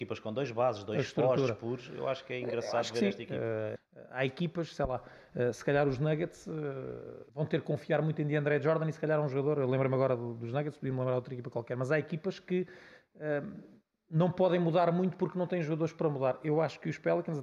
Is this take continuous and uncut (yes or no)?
no